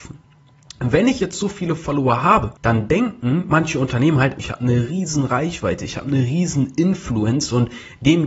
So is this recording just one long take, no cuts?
no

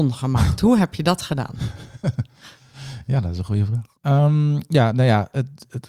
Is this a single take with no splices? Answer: no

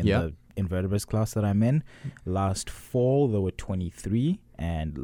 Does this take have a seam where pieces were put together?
no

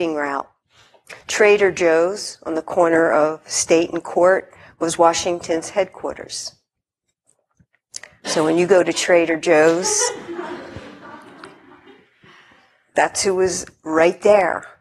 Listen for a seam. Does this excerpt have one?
no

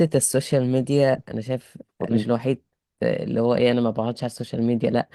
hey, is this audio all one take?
no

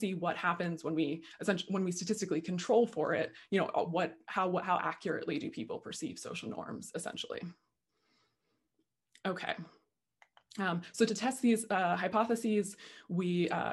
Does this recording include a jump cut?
no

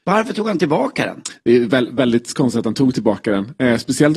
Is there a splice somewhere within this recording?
no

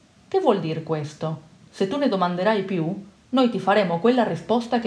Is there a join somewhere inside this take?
yes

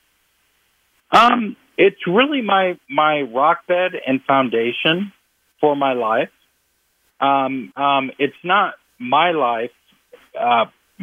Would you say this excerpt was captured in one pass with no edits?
no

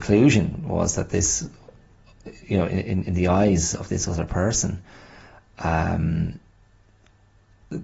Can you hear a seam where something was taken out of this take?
no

